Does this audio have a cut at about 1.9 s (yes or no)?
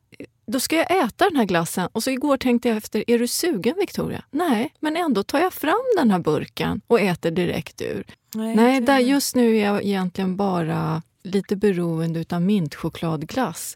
no